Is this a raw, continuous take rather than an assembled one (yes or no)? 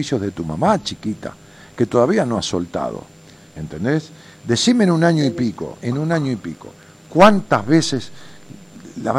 no